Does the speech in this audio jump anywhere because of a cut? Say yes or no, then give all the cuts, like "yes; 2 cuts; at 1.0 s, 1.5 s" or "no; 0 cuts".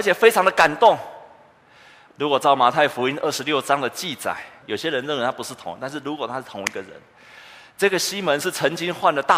yes; 2 cuts; at 2.1 s, 4.6 s